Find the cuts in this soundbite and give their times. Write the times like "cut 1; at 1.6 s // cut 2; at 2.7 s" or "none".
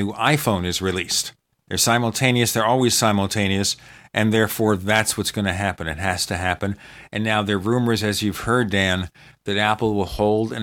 none

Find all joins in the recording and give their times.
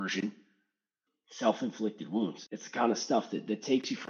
cut 1; at 1.1 s // cut 2; at 2.5 s

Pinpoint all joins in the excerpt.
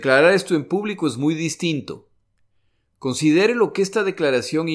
none

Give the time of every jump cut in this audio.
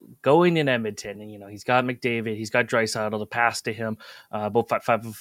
none

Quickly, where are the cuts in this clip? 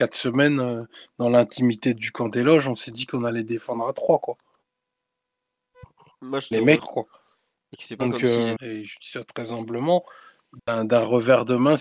cut 1; at 6.8 s // cut 2; at 8.6 s

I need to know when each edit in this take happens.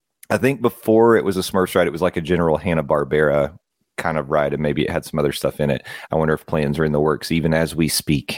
cut 1; at 6.1 s

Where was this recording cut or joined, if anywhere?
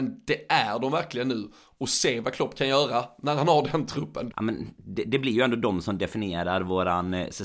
cut 1; at 4.3 s

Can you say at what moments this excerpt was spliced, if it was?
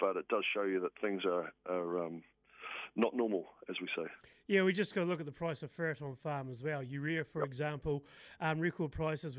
none

